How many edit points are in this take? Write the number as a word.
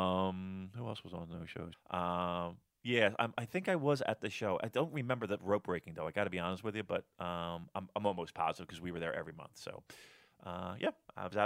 one